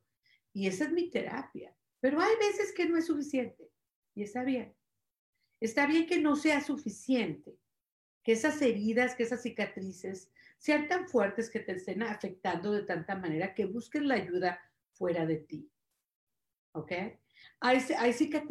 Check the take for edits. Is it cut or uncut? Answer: cut